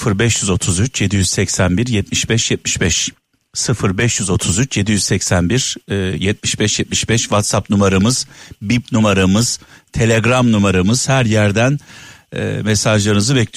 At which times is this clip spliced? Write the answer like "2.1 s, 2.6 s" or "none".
none